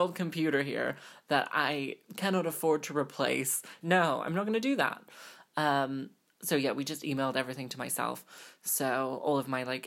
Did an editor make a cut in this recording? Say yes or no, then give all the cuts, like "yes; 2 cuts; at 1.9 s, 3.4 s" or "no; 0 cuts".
yes; 1 cut; at 3.8 s